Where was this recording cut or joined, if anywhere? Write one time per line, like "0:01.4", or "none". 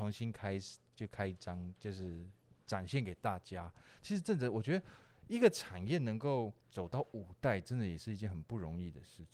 0:04.0
0:06.6